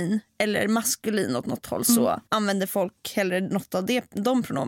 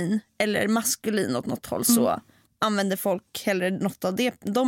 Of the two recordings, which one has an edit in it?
first; 1 cut; at 2.3 s

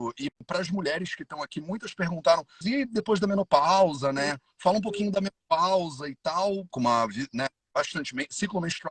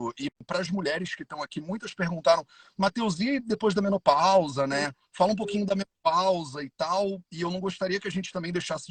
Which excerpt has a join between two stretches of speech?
first; 2 cuts; at 2.6 s, 6.7 s

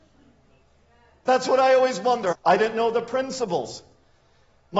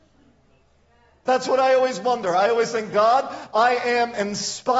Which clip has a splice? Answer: first; 1 cut; at 2.3 s

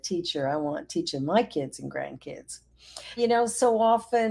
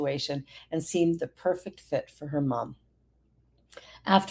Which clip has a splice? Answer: first; 1 cut; at 3.2 s

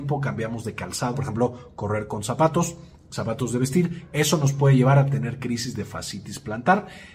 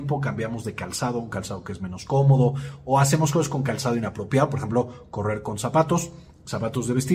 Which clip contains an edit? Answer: first; 1 cut; at 1.1 s

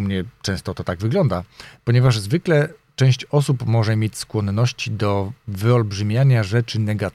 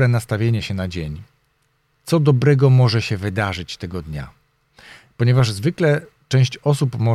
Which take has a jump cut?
first; 1 cut; at 1.7 s

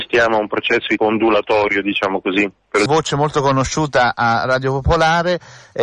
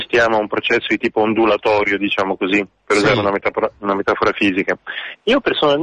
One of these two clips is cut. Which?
first; 2 cuts; at 1.0 s, 2.9 s

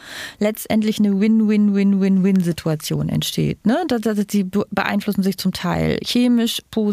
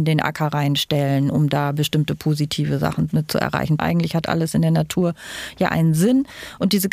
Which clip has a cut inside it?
second; 1 cut; at 3.8 s

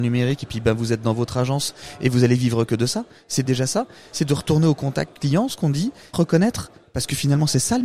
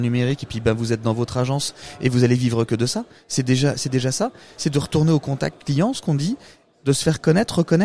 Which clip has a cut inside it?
first; 2 cuts; at 3.5 s, 6.1 s

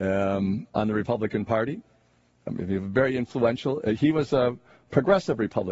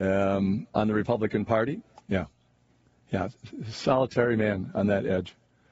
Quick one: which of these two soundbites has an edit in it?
second; 1 cut; at 2.0 s

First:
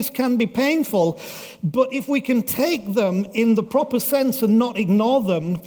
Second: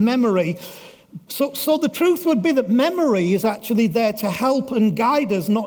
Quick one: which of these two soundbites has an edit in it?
second; 1 cut; at 1.3 s

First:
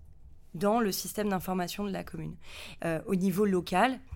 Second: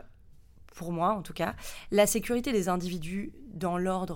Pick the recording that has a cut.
first; 1 cut; at 2.8 s

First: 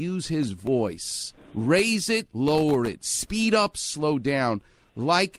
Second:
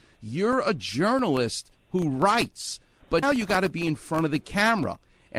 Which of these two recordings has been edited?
second; 1 cut; at 3.2 s

